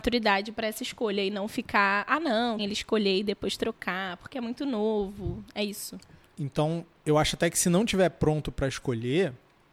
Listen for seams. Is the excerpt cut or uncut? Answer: cut